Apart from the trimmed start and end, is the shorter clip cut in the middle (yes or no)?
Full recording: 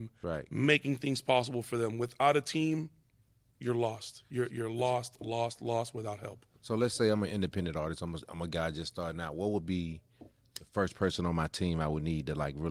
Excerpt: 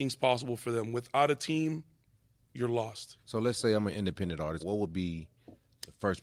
yes